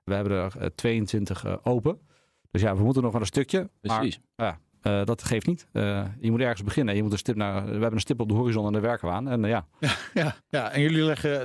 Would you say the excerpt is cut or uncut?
cut